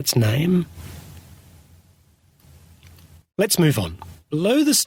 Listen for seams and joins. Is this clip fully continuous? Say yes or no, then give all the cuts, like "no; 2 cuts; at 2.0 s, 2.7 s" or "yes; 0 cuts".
yes; 0 cuts